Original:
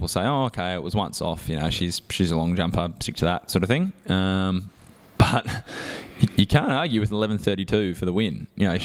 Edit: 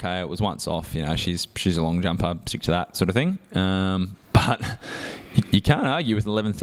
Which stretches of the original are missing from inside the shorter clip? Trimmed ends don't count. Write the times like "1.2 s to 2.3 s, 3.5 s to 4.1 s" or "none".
4.8 s to 5.1 s